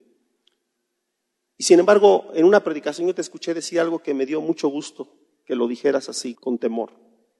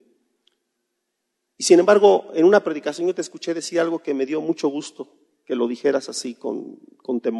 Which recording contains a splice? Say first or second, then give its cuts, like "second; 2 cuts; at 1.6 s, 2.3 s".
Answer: first; 1 cut; at 6.3 s